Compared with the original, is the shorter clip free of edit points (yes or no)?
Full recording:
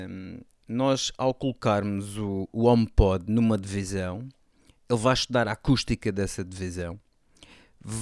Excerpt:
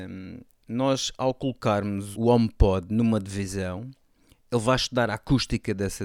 no